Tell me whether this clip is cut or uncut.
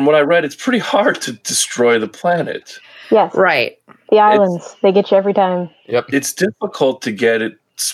uncut